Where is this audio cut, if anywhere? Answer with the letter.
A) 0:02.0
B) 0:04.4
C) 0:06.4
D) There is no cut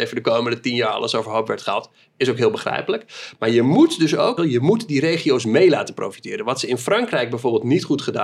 B